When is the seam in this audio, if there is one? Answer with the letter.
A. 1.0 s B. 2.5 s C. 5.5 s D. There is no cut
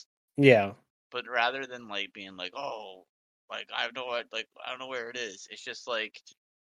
D